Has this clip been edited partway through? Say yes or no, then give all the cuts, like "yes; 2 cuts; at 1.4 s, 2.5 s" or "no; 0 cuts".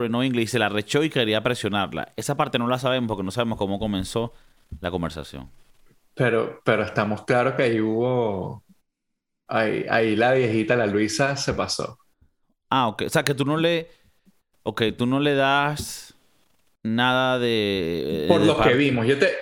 no; 0 cuts